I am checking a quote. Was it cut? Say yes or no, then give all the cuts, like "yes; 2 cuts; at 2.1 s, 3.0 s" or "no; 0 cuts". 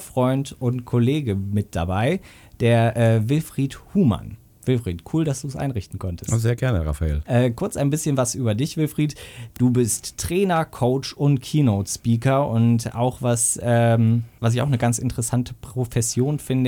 no; 0 cuts